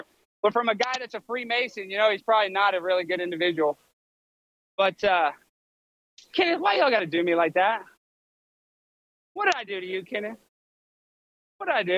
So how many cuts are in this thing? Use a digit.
0